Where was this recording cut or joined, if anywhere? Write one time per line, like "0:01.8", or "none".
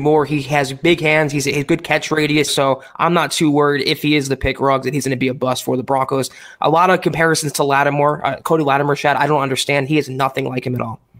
0:02.5